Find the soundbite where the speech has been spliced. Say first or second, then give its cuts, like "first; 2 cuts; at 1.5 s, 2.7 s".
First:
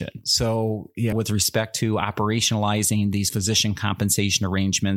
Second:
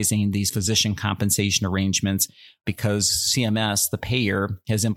first; 1 cut; at 1.1 s